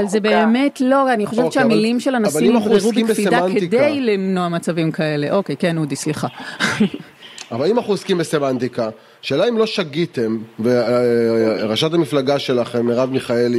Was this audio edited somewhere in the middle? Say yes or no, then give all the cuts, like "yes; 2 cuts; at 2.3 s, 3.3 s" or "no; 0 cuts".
no; 0 cuts